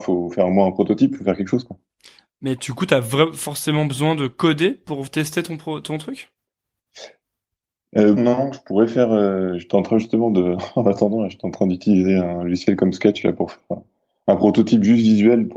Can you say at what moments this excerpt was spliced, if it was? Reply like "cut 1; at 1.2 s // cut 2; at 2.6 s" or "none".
cut 1; at 8.2 s